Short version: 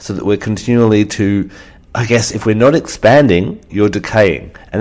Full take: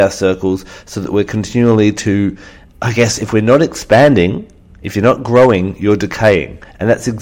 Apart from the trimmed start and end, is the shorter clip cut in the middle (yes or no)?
yes